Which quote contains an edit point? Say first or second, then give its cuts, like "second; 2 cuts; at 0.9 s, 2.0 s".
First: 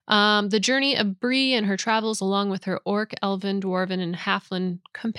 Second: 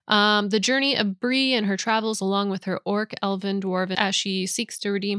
second; 1 cut; at 3.9 s